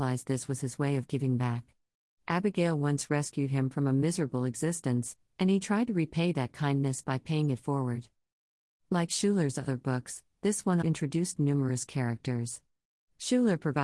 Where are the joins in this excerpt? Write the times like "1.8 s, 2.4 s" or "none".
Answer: 10.8 s